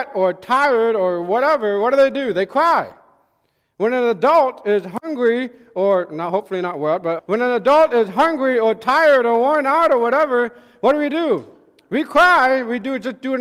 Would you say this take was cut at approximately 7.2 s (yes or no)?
yes